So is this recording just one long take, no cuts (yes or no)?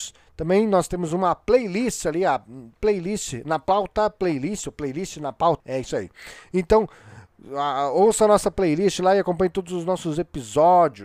no